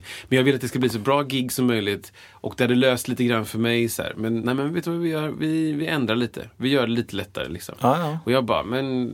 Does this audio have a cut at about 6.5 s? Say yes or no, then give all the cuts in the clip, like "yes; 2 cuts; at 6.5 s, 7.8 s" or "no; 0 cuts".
no; 1 cut; at 4.4 s